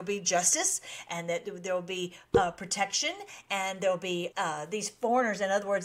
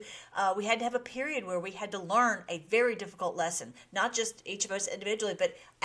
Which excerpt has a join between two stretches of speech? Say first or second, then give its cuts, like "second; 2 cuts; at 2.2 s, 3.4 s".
first; 1 cut; at 4.3 s